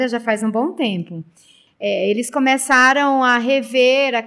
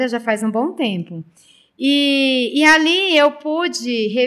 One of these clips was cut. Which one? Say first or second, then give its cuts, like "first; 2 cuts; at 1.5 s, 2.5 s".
first; 1 cut; at 1.7 s